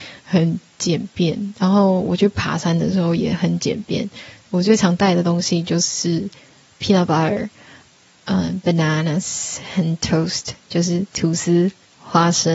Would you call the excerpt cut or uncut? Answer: uncut